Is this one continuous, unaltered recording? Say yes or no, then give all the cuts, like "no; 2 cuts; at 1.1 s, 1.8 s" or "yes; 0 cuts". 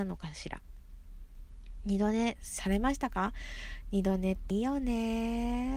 no; 1 cut; at 4.5 s